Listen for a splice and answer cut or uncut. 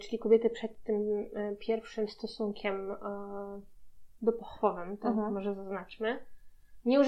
uncut